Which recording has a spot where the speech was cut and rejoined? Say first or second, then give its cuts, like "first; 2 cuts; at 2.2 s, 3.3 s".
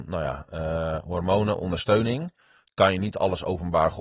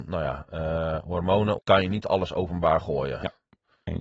second; 1 cut; at 1.6 s